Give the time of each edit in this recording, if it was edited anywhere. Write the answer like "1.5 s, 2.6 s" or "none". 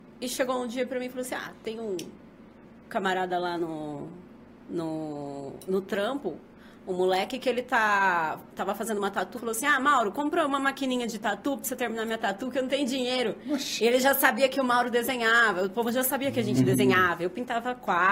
9.4 s